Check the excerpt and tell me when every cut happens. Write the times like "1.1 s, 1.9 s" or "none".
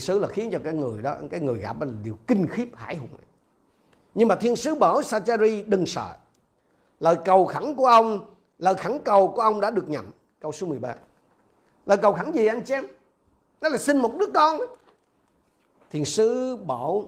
15.7 s